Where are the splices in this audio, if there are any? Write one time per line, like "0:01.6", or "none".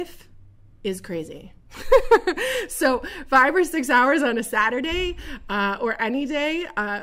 none